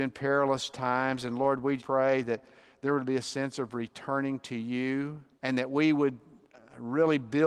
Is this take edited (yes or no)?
yes